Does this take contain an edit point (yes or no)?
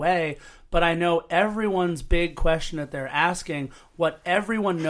no